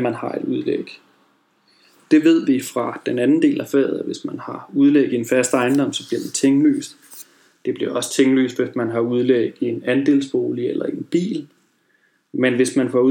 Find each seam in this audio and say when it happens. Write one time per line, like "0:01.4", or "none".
none